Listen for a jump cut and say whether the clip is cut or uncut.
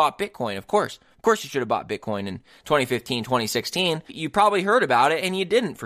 cut